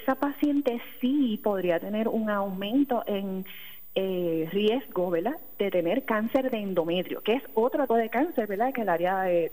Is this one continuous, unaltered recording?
no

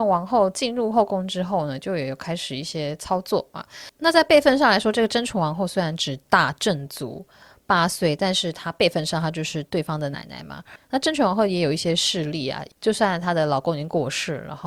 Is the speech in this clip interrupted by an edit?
no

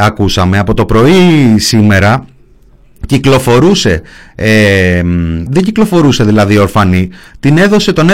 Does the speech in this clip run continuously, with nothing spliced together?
no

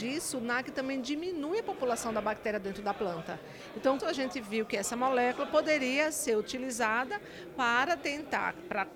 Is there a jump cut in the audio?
yes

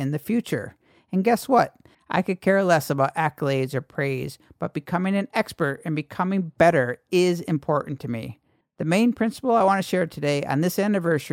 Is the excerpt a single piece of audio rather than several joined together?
no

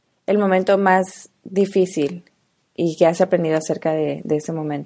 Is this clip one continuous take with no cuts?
yes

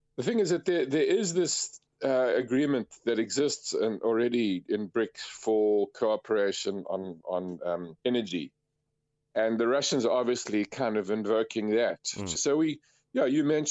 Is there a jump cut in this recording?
yes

